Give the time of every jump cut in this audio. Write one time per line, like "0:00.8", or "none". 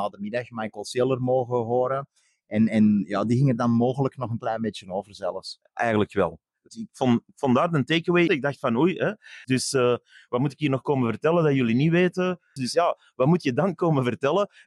0:08.3
0:09.4
0:12.6